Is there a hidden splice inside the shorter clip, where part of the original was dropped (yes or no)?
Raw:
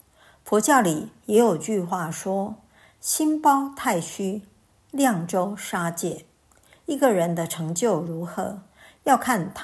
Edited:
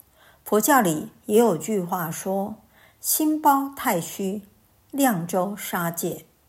no